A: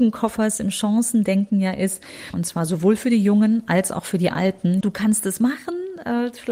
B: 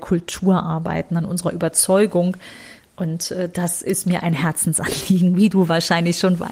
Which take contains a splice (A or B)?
A